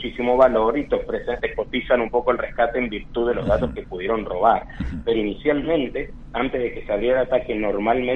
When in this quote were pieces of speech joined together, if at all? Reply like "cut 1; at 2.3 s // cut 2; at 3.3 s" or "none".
cut 1; at 1.4 s